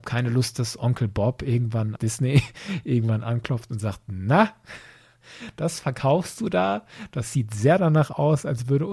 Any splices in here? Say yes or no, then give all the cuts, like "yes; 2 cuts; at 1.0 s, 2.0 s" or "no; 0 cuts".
yes; 1 cut; at 1.9 s